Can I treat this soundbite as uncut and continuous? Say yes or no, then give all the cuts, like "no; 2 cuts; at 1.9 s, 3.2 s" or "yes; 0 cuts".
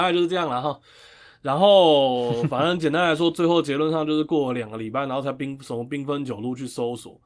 yes; 0 cuts